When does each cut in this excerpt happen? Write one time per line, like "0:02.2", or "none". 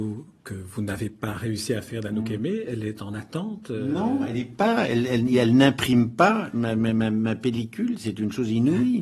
none